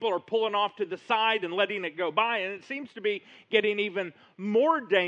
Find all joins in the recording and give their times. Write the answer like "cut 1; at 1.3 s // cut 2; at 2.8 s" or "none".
none